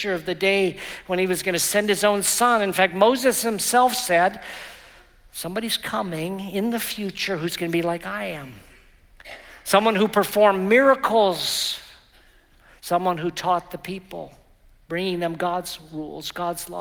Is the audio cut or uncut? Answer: uncut